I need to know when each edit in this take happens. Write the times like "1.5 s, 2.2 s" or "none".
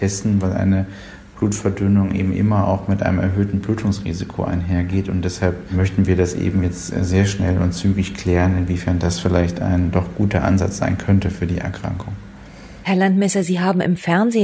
none